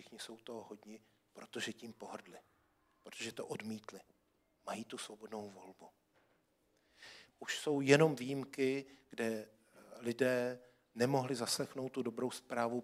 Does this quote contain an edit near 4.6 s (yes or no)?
no